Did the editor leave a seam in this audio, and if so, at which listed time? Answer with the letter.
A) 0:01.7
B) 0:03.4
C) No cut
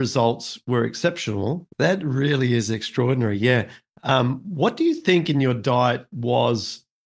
A